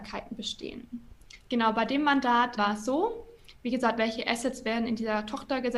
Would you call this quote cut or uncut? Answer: cut